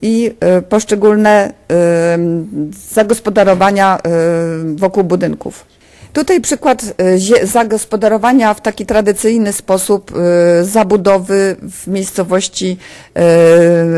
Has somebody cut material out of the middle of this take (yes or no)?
no